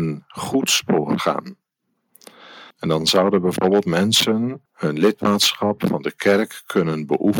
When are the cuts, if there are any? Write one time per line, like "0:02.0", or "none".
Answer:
0:02.7
0:04.7